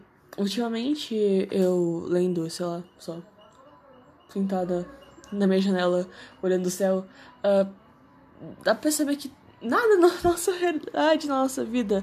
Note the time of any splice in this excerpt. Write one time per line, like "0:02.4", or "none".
none